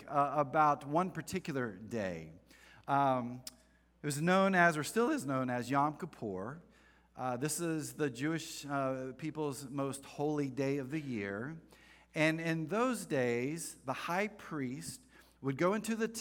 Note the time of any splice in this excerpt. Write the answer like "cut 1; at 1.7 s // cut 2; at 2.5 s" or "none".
none